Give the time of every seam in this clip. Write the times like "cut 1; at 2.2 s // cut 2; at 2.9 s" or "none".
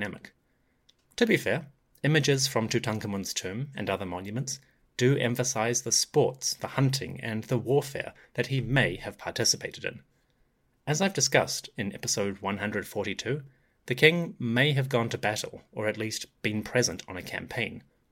none